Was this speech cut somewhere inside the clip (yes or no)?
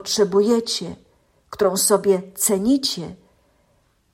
no